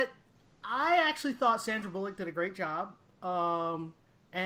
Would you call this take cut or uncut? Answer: uncut